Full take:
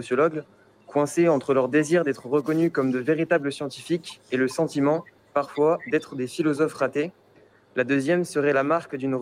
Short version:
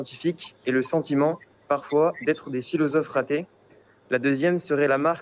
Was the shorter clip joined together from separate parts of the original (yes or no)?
no